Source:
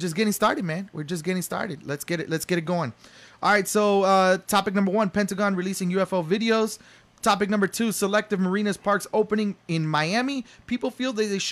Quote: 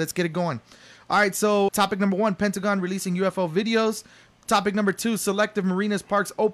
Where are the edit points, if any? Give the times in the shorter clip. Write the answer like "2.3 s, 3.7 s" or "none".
1.7 s